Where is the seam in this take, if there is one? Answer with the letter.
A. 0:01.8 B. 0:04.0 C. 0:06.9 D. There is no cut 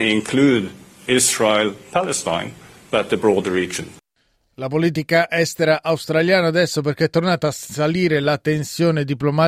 D